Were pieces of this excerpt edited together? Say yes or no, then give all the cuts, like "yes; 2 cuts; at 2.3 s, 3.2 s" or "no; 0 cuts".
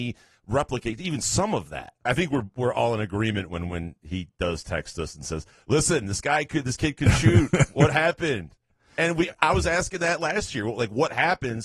yes; 1 cut; at 2.1 s